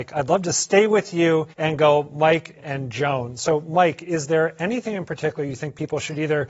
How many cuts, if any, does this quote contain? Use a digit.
2